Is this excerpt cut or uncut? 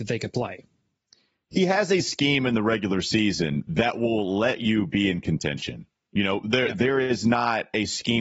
uncut